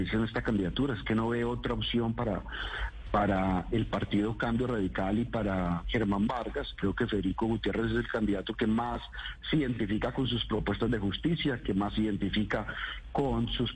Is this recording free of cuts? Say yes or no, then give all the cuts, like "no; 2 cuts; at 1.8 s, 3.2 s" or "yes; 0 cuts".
yes; 0 cuts